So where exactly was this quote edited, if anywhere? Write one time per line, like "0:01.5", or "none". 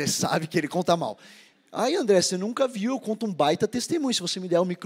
none